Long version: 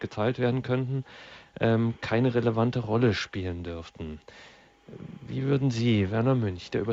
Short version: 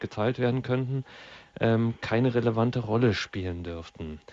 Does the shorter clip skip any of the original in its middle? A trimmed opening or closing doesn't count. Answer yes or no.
no